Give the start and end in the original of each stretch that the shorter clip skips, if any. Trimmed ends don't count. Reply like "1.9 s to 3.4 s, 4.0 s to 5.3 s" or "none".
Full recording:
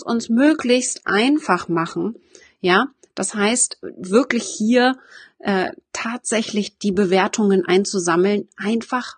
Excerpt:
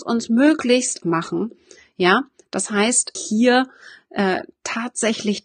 1.0 s to 1.7 s, 3.8 s to 4.4 s